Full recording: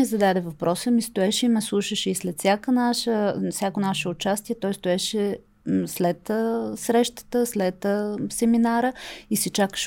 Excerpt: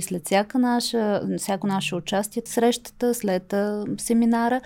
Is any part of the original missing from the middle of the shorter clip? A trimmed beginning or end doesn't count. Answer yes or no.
yes